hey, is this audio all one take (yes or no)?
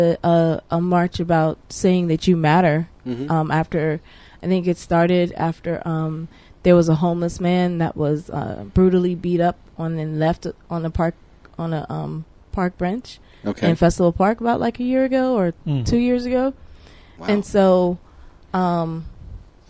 yes